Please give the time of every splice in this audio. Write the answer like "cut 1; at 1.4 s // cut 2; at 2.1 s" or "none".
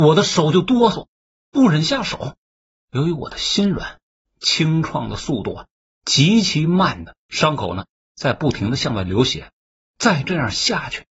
none